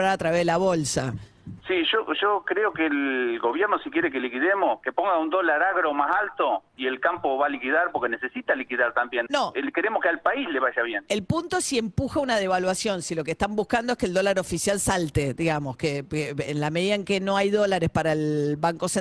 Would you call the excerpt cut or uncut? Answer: cut